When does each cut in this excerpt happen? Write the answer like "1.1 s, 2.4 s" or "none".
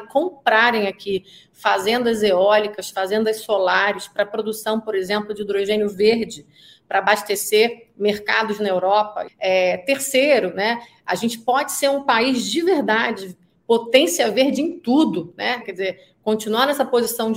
9.3 s, 15.6 s